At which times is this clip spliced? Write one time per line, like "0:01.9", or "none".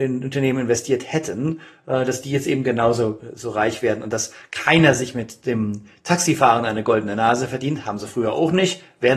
none